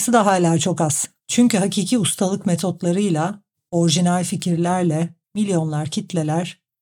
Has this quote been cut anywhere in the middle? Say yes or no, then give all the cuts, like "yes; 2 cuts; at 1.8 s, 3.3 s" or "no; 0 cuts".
yes; 2 cuts; at 1.2 s, 5.2 s